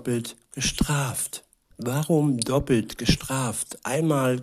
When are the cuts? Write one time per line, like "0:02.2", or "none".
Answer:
0:01.7